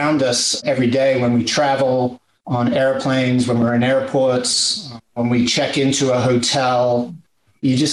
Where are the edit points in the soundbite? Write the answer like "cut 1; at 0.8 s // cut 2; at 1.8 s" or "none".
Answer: none